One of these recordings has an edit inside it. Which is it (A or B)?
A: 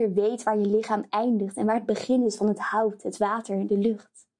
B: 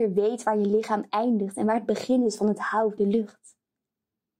B